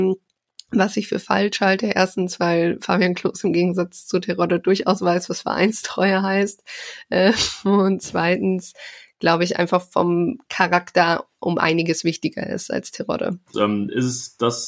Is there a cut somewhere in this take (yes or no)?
yes